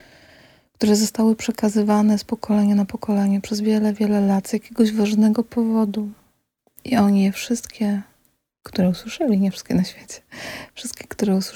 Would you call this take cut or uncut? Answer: uncut